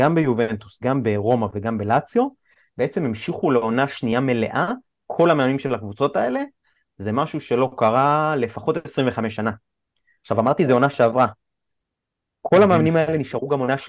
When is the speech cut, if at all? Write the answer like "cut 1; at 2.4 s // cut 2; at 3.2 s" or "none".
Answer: none